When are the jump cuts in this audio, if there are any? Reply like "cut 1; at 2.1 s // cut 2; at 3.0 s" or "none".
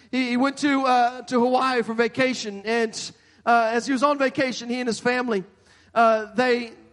none